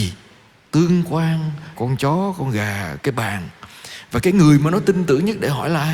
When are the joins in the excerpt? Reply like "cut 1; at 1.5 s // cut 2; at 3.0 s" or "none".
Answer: cut 1; at 1.8 s // cut 2; at 3.0 s